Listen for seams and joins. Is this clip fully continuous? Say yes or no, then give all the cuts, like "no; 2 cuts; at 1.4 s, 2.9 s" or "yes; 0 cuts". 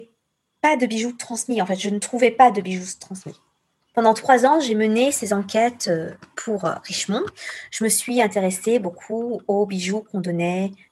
yes; 0 cuts